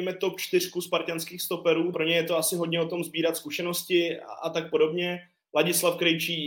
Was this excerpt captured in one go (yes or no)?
no